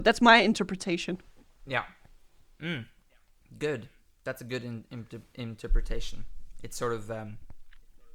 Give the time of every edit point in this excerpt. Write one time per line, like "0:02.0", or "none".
none